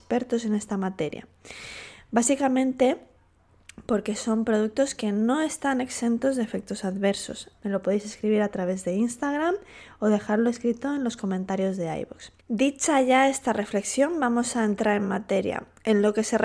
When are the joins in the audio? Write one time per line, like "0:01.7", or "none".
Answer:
0:07.6
0:12.4